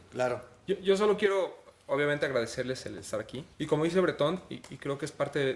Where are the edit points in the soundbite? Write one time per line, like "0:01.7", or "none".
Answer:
0:03.5